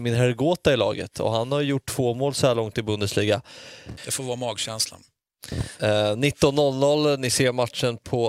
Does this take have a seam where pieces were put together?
yes; 2 cuts; at 4.0 s, 5.8 s

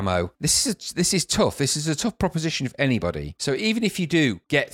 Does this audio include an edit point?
no; 0 cuts

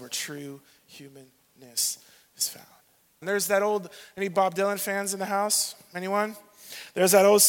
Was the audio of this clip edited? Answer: yes; 1 cut; at 3.2 s

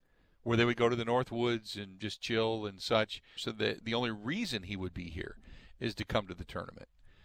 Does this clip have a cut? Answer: yes; 1 cut; at 3.4 s

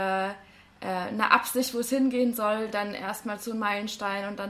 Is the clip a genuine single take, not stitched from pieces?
yes; 0 cuts

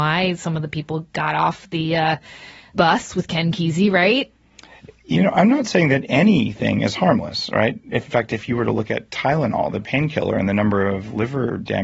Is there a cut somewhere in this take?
no; 0 cuts

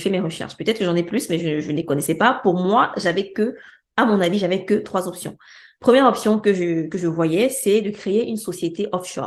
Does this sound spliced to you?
no; 0 cuts

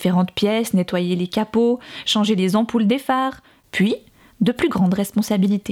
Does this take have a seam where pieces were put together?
no; 0 cuts

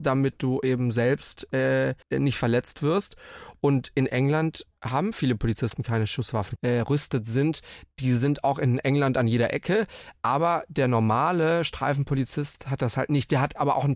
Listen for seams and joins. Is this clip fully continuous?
no; 2 cuts; at 2.0 s, 6.6 s

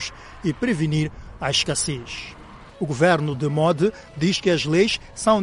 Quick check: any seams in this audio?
yes; 1 cut; at 2.7 s

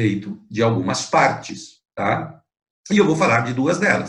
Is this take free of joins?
yes; 0 cuts

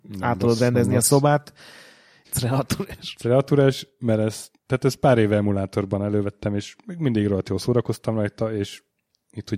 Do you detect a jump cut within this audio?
yes; 2 cuts; at 2.2 s, 4.6 s

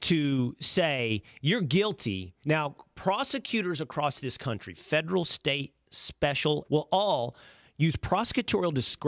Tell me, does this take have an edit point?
yes; 2 cuts; at 2.4 s, 6.6 s

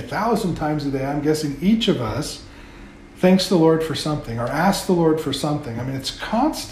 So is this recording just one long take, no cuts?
yes; 0 cuts

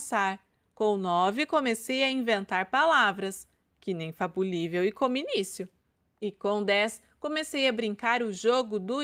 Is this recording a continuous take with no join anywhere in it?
yes; 0 cuts

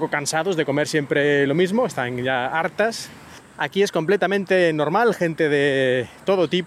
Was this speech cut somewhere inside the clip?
yes; 1 cut; at 3.4 s

